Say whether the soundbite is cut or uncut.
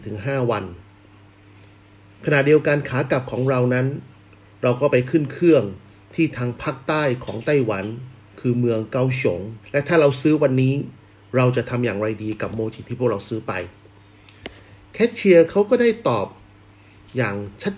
cut